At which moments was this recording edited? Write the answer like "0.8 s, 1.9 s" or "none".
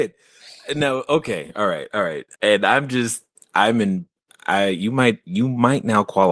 2.4 s